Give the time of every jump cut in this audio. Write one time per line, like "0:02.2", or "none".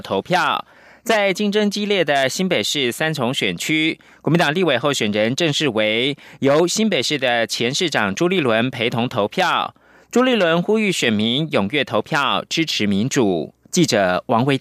none